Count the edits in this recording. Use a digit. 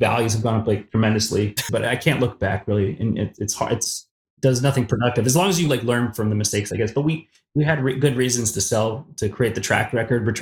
1